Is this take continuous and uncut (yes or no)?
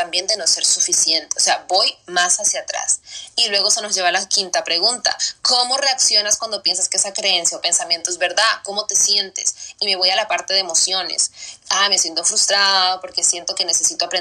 yes